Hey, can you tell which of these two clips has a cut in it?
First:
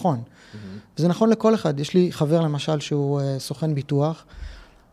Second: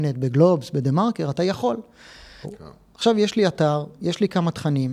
second; 1 cut; at 2.4 s

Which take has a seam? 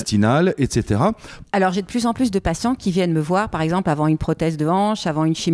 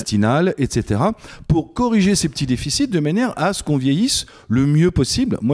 first; 1 cut; at 1.4 s

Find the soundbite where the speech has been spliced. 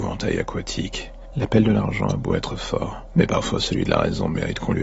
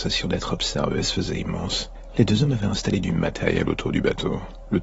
first; 1 cut; at 1.3 s

